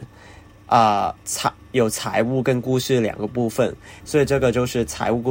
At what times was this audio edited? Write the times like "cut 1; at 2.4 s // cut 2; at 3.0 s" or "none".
cut 1; at 4.0 s